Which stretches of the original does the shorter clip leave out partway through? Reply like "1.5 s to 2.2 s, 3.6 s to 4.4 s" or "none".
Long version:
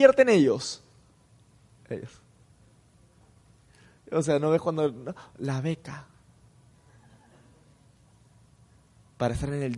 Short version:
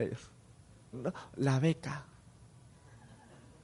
2.8 s to 4.9 s